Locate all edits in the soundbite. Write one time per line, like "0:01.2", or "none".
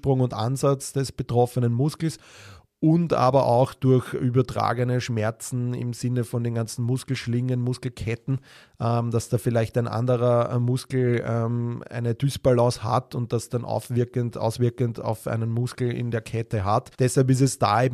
0:16.9